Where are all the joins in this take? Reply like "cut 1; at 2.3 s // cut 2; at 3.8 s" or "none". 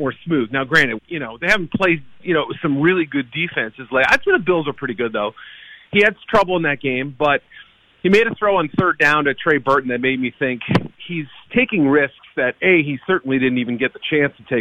cut 1; at 1.0 s